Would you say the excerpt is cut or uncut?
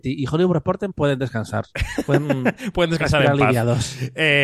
uncut